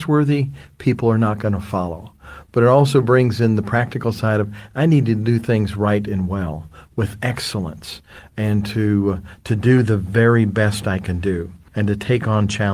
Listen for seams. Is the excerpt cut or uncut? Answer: uncut